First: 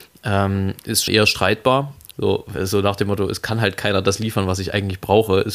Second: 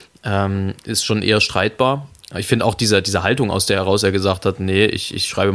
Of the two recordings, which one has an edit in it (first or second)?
first